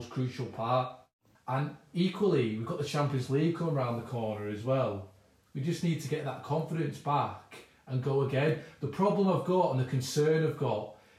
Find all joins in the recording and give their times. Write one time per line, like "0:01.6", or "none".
0:01.4
0:05.5